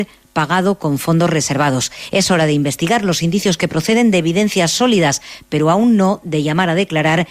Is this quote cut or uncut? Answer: cut